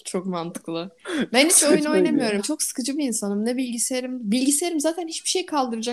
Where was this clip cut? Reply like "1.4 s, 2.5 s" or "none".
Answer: 2.4 s

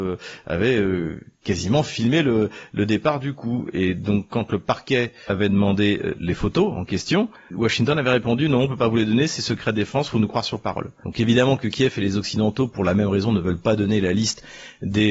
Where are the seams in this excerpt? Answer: none

